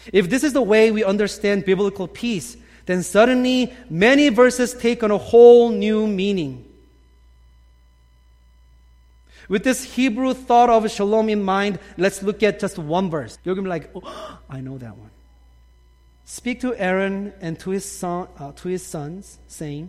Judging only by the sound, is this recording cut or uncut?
cut